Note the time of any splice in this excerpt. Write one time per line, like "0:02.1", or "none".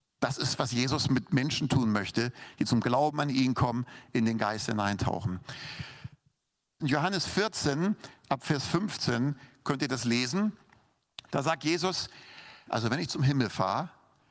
0:06.8
0:12.7